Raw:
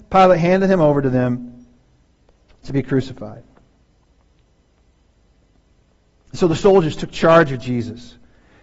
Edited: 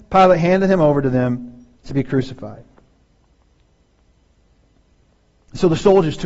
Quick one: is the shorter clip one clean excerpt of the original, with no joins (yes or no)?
no